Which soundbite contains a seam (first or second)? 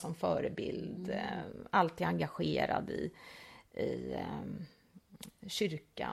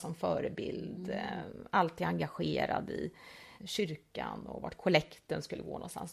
second